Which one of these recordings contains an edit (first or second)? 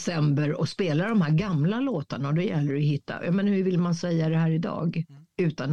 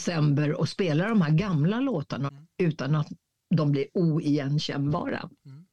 second